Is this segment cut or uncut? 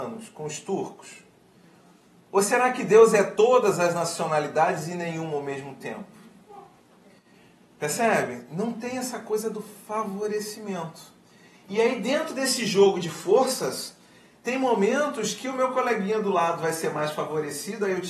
uncut